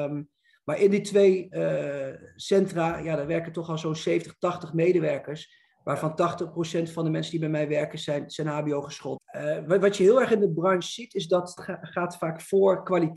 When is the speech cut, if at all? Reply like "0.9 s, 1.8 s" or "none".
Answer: 9.2 s, 11.6 s